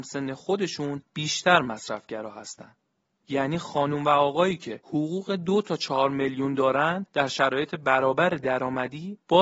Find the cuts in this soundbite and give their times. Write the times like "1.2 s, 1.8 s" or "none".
3.1 s